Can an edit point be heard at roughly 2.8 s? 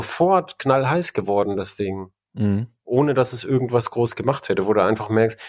no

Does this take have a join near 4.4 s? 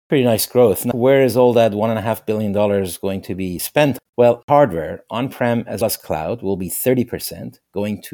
no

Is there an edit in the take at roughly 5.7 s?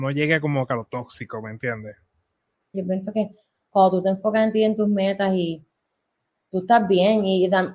no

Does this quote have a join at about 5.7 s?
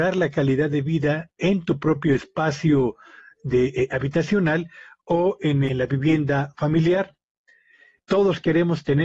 yes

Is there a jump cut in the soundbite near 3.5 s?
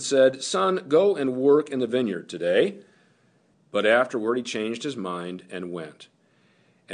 yes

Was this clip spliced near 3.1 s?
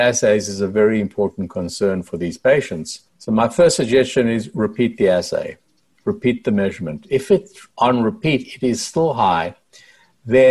yes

